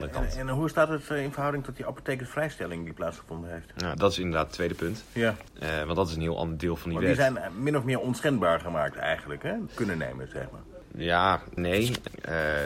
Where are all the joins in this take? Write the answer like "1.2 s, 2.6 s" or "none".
3.9 s, 9.7 s, 11.6 s